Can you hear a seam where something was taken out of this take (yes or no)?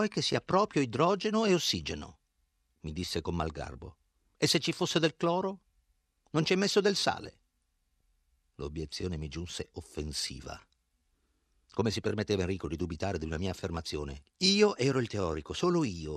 no